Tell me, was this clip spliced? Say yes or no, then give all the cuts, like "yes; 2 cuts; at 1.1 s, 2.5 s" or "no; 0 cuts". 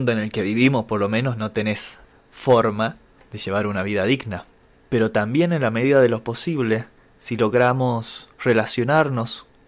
yes; 1 cut; at 8.3 s